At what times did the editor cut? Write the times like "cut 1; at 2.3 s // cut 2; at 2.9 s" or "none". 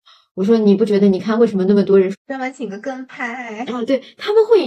cut 1; at 2.1 s